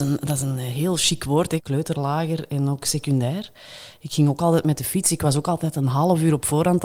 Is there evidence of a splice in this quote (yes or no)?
yes